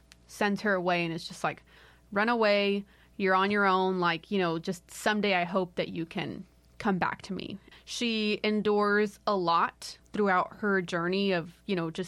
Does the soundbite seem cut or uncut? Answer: cut